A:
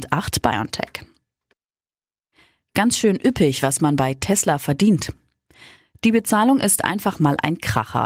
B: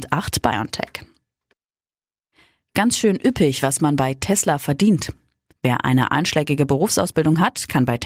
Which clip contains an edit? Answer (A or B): B